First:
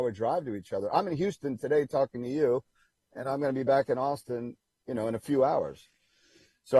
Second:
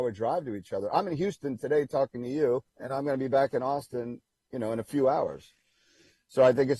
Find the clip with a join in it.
second; 1 cut; at 2.7 s

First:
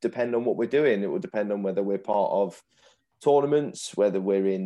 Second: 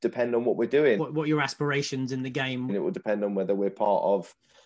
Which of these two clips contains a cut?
second; 2 cuts; at 1.0 s, 2.7 s

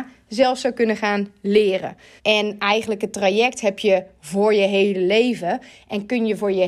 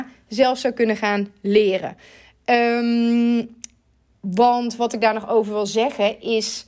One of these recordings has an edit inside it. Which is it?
first; 1 cut; at 2.2 s

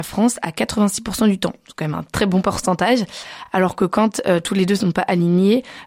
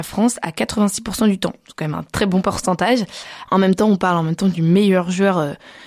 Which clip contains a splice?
second; 1 cut; at 3.5 s

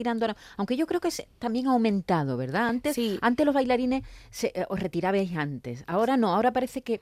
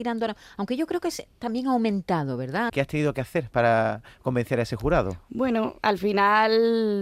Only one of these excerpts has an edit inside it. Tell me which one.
second; 1 cut; at 2.7 s

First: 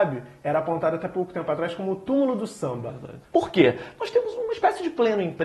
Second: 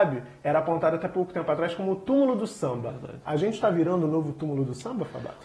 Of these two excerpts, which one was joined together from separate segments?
first; 1 cut; at 3.2 s

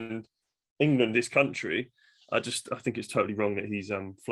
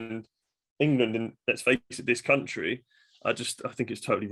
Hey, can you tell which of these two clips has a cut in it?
first; 1 cut; at 1.1 s

